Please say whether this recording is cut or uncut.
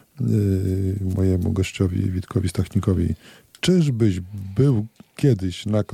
uncut